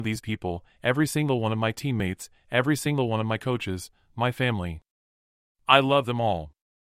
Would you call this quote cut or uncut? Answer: uncut